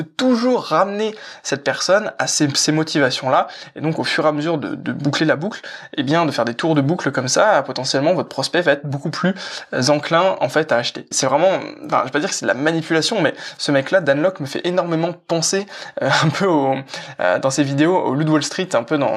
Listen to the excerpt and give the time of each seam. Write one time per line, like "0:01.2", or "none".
0:11.1